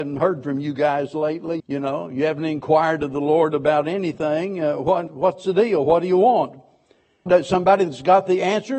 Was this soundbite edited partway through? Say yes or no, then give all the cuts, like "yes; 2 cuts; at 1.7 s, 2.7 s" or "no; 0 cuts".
yes; 3 cuts; at 1.6 s, 5.1 s, 7.3 s